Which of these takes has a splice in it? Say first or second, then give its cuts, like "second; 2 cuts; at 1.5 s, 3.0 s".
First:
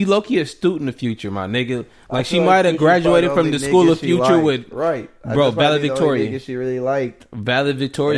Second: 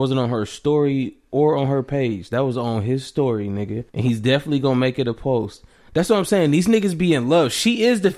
second; 1 cut; at 3.9 s